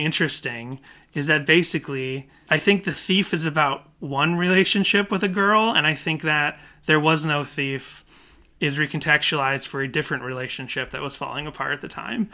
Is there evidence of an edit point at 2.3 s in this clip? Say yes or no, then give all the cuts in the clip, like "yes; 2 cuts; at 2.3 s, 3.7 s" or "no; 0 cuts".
no; 0 cuts